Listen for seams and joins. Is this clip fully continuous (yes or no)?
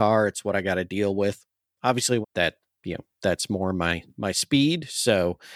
no